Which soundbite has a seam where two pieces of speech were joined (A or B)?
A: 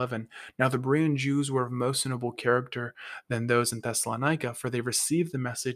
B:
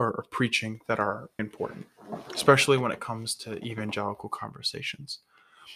B